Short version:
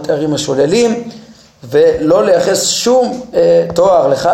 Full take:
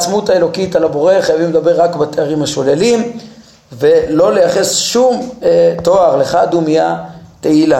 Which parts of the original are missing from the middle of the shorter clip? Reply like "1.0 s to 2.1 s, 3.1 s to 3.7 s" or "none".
none